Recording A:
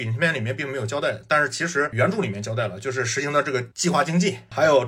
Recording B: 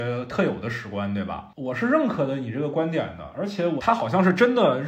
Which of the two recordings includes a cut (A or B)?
B